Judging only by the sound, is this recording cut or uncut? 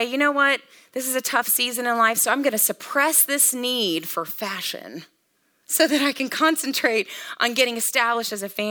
uncut